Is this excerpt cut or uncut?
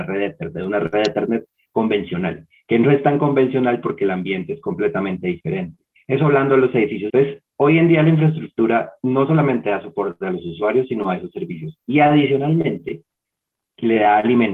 cut